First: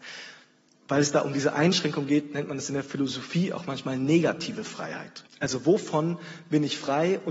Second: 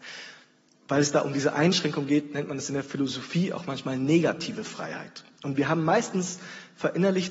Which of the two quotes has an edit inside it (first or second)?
first